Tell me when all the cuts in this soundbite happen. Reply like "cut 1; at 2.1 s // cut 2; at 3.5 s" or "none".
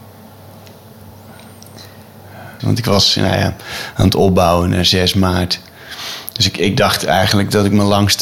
cut 1; at 2.6 s